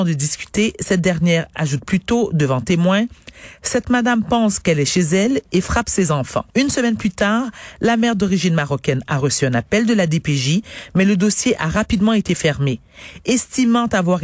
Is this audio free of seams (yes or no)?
no